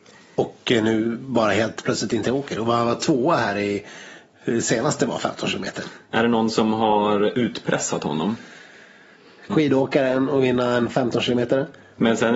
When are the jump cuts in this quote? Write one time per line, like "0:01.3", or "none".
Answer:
0:06.1
0:09.5